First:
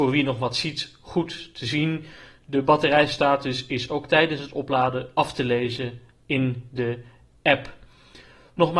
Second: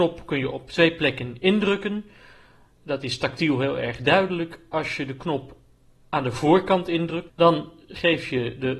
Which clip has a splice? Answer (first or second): second